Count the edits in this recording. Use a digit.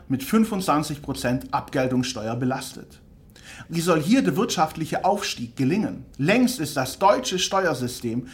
2